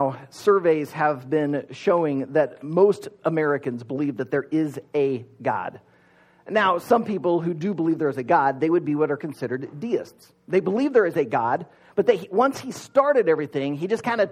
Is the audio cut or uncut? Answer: uncut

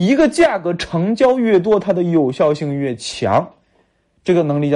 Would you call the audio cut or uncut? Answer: uncut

